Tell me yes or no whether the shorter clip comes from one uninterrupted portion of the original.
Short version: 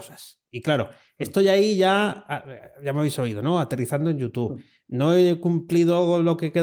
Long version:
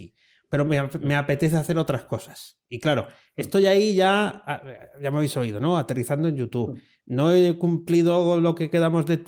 yes